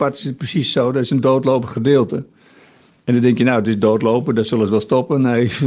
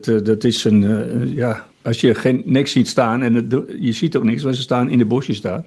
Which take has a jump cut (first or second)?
second